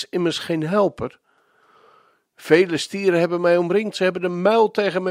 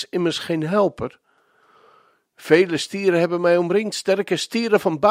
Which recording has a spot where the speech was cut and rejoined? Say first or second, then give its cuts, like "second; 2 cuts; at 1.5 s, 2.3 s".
first; 1 cut; at 3.9 s